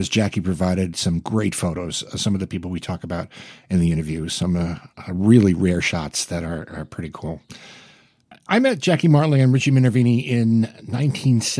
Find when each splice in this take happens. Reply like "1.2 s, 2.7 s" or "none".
none